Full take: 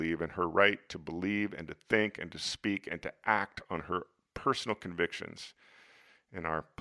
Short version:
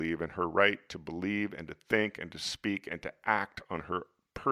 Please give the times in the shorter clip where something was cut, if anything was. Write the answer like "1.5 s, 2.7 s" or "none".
none